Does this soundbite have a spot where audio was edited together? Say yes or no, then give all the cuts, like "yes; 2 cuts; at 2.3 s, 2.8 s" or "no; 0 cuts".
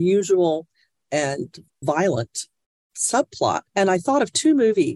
yes; 1 cut; at 3.7 s